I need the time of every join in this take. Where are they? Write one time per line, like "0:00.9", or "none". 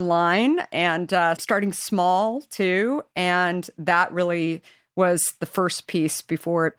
0:01.4